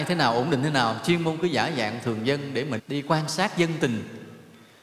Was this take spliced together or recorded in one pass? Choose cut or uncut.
cut